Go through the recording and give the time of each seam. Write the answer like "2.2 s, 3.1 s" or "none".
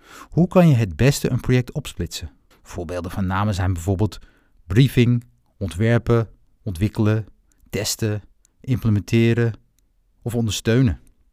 2.5 s